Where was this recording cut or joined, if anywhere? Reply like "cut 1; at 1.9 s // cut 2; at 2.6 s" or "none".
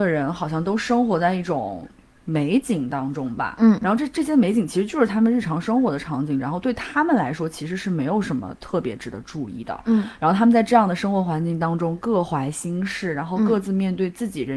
none

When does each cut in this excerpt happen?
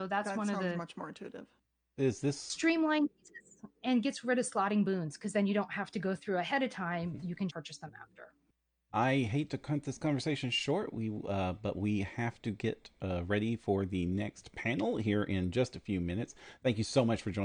cut 1; at 7.5 s

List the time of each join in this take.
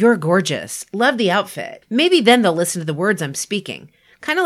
cut 1; at 1.8 s

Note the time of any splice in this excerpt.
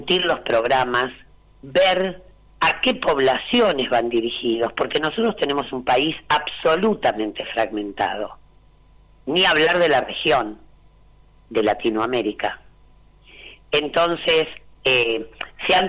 none

